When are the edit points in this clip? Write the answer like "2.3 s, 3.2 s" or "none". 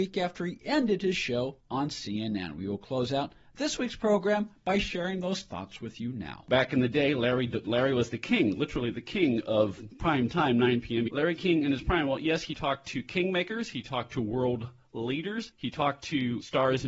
11.1 s, 13.7 s